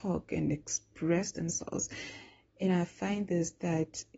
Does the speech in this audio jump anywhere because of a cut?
no; 0 cuts

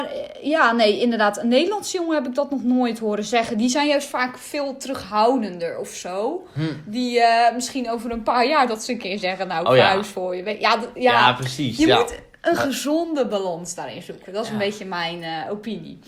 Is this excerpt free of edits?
yes; 0 cuts

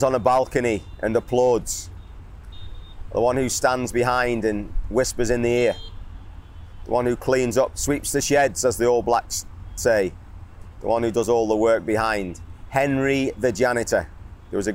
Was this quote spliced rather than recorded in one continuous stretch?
no; 0 cuts

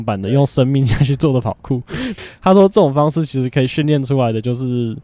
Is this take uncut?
no; 1 cut; at 2.2 s

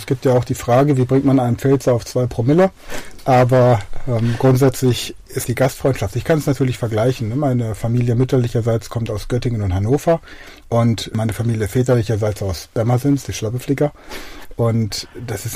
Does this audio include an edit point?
yes; 2 cuts; at 3.2 s, 5.4 s

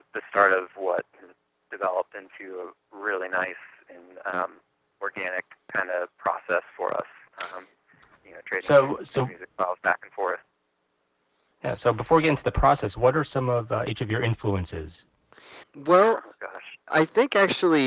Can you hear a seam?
yes; 2 cuts; at 15.6 s, 16.9 s

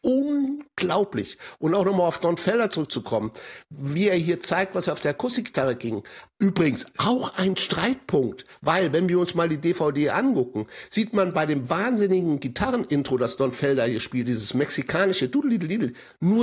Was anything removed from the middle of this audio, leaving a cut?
no; 0 cuts

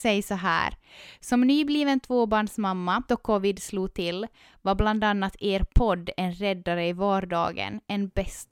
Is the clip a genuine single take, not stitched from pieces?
no; 1 cut; at 3.1 s

